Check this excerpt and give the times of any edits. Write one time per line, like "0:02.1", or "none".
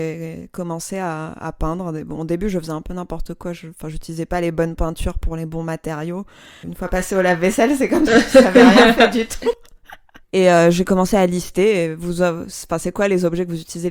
0:06.6
0:10.2